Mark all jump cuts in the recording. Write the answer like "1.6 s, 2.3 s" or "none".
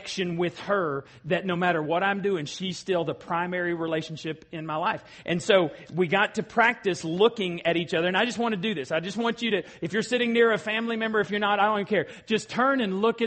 none